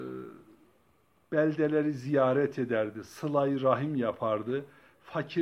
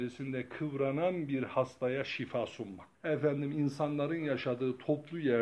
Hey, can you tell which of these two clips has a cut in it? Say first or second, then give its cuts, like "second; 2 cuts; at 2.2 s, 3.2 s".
second; 1 cut; at 2.9 s